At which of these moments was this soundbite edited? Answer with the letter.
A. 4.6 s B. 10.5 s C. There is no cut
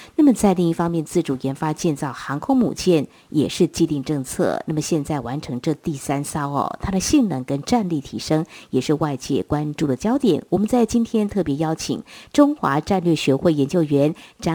C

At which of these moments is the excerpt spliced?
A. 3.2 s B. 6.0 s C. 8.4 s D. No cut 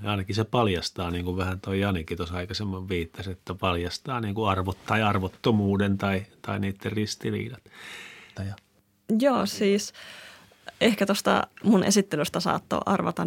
C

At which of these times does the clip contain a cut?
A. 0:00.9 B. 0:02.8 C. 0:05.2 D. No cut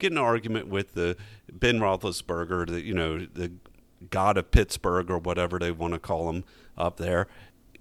D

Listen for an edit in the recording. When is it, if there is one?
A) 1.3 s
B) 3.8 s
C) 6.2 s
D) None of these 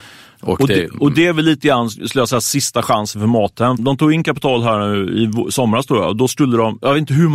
B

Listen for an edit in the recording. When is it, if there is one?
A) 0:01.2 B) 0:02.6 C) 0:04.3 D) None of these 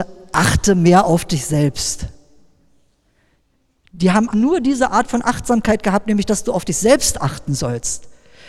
C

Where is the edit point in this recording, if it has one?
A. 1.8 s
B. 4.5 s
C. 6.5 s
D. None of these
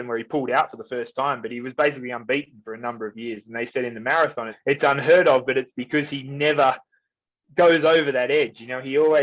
B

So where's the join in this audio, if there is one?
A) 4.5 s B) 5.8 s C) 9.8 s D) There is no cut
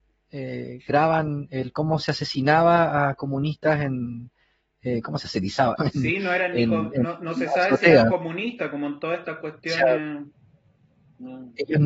B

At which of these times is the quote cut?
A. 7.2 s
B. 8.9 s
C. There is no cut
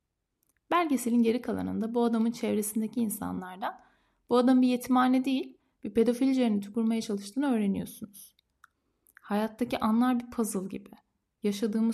C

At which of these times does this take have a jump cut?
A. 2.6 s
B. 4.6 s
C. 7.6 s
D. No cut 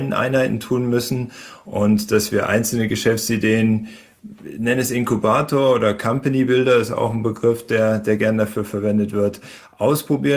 D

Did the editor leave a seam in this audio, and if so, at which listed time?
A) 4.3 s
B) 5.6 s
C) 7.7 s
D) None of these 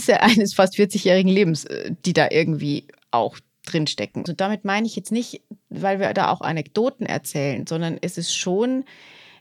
A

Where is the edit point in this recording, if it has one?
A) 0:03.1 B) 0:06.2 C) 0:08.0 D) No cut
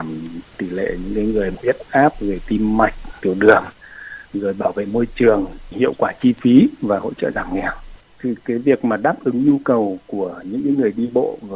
D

